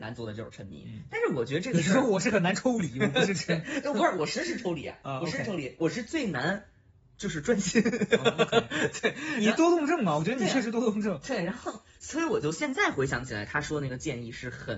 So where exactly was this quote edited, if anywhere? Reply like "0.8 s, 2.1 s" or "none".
none